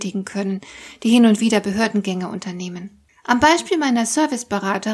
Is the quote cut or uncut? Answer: cut